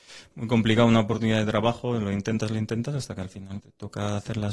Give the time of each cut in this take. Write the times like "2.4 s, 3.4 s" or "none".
3.6 s